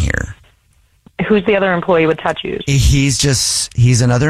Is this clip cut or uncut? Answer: uncut